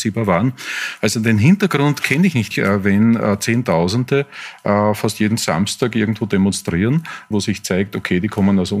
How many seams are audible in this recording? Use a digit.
2